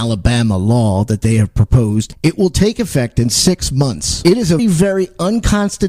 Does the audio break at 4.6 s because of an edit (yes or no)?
yes